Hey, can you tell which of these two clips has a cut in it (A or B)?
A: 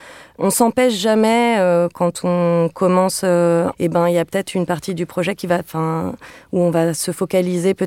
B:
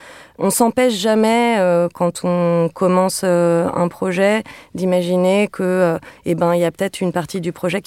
A